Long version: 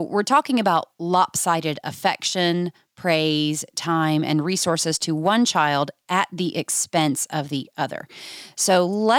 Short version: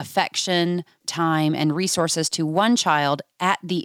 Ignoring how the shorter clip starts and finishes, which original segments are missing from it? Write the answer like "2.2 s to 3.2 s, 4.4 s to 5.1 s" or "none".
2.9 s to 3.7 s